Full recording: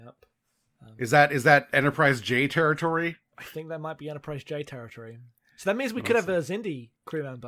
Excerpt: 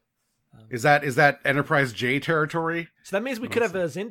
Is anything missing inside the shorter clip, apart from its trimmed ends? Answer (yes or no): yes